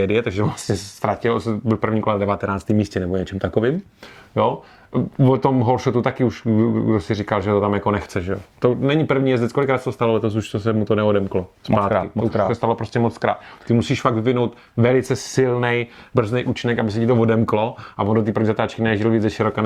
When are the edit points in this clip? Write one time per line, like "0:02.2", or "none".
none

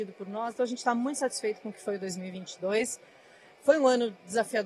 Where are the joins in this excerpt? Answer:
none

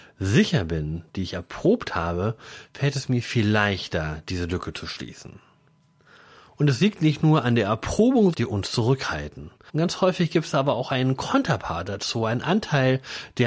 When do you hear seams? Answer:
0:08.3
0:09.7

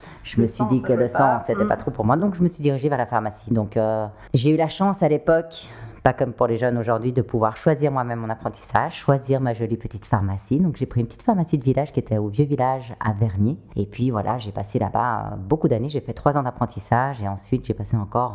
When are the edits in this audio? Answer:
none

